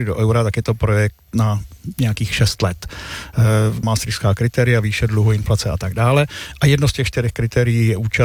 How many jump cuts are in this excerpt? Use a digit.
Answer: 1